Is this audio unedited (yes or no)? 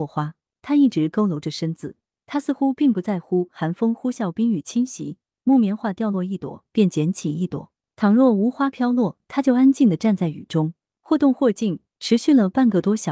yes